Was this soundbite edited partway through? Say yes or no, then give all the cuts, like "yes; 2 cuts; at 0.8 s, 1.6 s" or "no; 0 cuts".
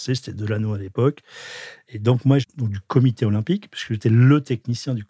yes; 1 cut; at 2.4 s